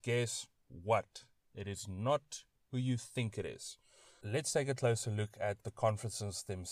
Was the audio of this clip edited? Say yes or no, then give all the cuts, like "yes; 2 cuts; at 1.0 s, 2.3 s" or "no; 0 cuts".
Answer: yes; 1 cut; at 4.2 s